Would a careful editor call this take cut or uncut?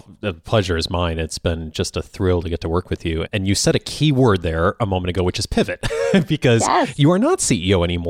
uncut